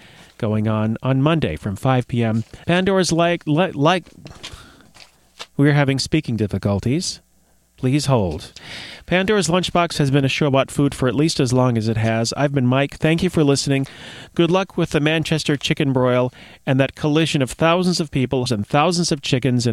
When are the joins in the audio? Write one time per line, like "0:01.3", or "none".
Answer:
0:02.6
0:18.5